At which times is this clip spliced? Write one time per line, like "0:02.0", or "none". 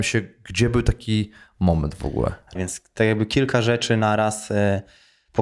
0:02.6